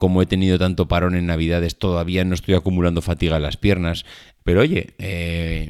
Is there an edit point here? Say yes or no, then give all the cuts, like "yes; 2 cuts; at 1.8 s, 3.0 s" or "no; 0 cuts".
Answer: yes; 1 cut; at 4.4 s